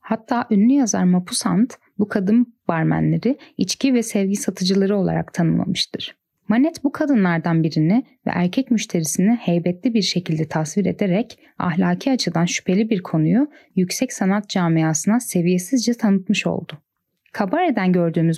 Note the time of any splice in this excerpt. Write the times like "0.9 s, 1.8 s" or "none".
none